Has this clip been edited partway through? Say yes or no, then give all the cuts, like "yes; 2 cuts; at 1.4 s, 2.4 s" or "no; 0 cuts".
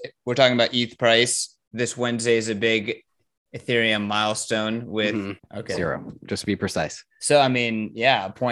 yes; 2 cuts; at 5.4 s, 7.1 s